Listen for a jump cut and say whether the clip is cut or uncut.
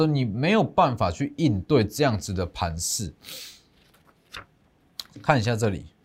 uncut